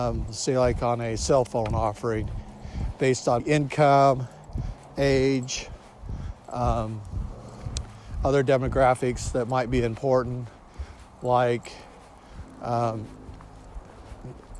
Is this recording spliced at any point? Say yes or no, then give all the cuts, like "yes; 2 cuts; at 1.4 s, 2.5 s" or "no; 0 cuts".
yes; 1 cut; at 3.4 s